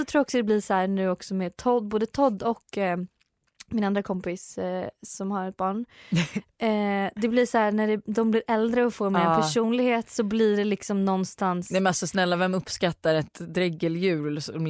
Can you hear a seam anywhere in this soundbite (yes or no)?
no